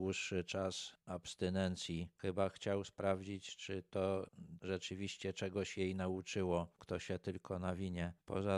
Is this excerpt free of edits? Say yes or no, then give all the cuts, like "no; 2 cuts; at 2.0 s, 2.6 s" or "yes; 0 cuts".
no; 2 cuts; at 4.6 s, 6.8 s